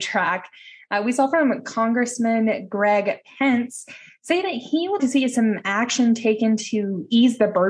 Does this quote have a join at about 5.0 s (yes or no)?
yes